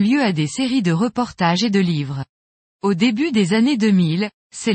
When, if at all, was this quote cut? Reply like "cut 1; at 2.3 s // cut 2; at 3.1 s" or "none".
cut 1; at 2.6 s